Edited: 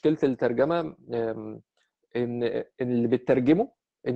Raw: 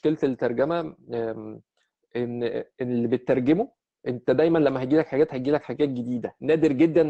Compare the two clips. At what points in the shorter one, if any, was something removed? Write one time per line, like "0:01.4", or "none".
none